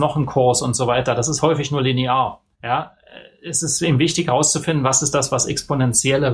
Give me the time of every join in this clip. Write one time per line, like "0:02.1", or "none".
0:02.5